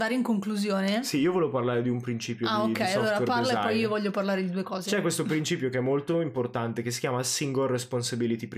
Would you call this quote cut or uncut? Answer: uncut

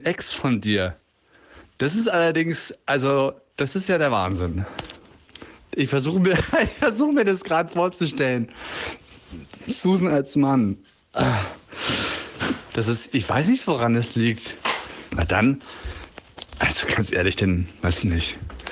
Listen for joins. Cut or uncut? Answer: cut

